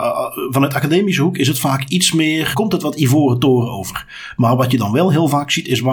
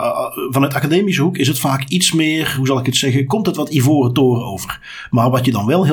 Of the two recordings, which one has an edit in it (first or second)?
first